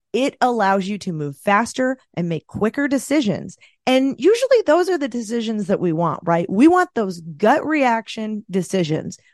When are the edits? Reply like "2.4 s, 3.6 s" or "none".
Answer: none